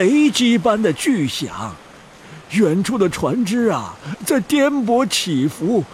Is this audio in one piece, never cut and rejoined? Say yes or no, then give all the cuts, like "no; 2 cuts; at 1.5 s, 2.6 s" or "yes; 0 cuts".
yes; 0 cuts